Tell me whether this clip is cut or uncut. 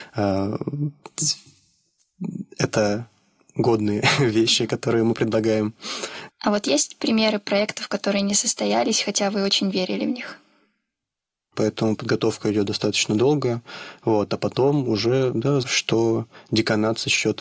cut